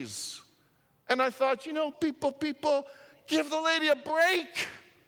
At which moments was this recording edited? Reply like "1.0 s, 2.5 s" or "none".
1.9 s